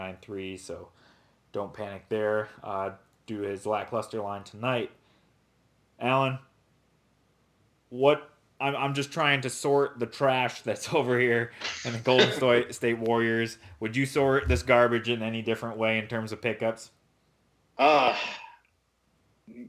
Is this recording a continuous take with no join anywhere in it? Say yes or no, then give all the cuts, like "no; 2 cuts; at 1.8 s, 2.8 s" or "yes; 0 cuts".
yes; 0 cuts